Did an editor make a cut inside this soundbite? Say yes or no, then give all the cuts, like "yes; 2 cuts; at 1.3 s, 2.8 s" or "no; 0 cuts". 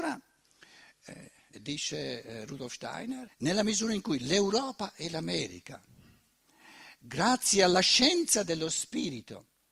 yes; 2 cuts; at 1.5 s, 3.3 s